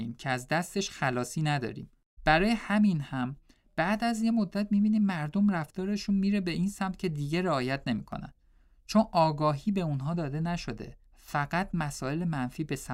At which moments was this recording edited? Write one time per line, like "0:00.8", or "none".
0:02.2
0:11.1